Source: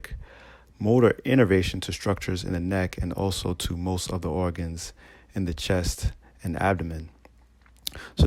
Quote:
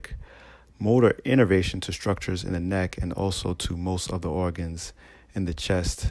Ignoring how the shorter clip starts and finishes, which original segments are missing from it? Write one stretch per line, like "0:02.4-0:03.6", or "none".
none